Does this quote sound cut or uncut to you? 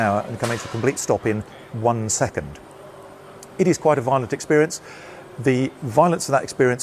uncut